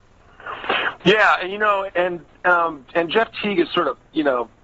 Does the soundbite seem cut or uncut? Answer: cut